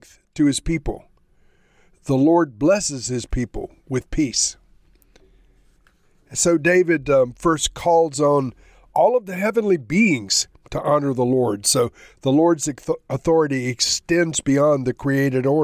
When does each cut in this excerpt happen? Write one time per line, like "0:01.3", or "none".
none